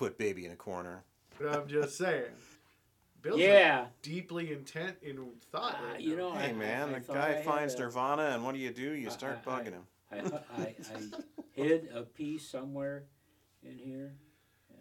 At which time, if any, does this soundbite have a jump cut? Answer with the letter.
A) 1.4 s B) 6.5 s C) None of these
A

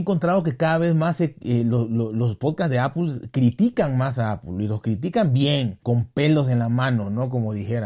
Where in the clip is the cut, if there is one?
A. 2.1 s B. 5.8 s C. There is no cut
C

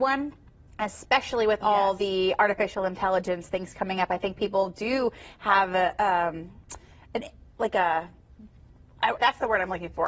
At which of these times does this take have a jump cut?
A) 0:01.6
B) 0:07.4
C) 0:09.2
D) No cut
C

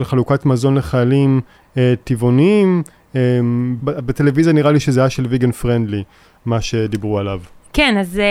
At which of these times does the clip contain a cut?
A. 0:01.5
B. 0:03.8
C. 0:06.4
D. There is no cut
B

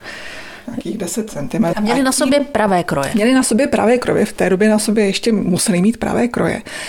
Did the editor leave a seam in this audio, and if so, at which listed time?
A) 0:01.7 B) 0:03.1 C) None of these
A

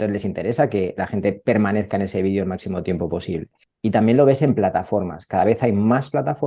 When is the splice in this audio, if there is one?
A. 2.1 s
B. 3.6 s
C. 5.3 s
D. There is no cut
B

